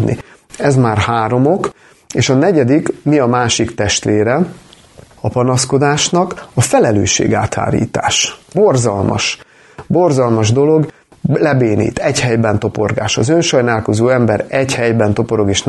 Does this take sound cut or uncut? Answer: cut